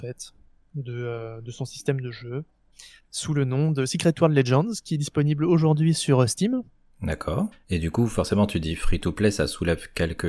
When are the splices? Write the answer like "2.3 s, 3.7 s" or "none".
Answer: 7.5 s